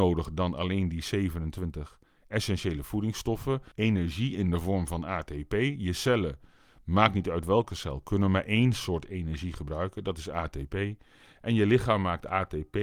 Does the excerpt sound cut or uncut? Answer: cut